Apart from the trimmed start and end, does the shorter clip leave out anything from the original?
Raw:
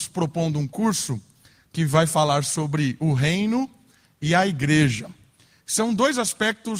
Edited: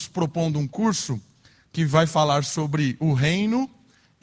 no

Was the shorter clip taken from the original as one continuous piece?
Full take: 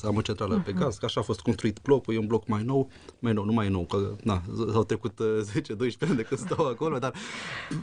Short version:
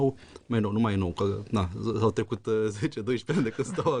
yes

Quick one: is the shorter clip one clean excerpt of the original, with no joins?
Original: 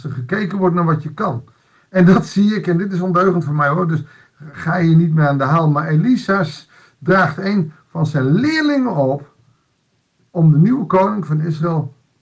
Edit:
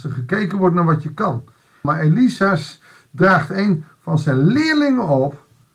no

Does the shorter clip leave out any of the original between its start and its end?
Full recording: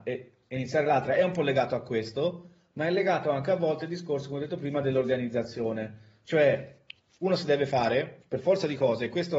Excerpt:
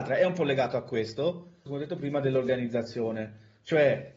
yes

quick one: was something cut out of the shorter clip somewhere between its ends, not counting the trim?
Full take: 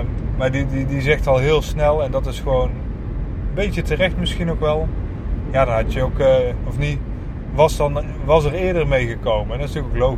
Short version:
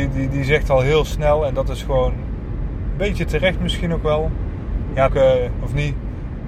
yes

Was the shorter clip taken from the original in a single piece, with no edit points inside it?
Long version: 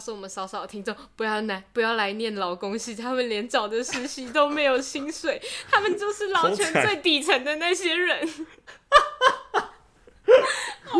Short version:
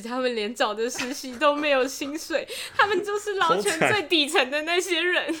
yes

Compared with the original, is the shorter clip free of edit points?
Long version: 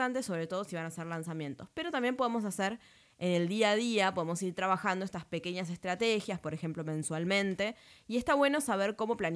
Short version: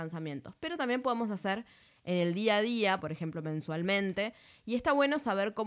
no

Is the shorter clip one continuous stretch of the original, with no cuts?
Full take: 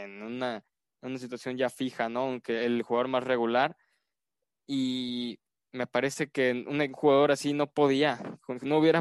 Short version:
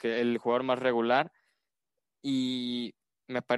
yes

